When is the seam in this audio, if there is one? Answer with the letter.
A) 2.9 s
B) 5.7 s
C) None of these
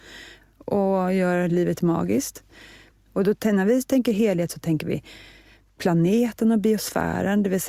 A